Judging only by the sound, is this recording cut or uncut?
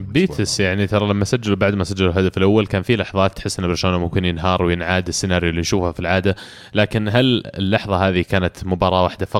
uncut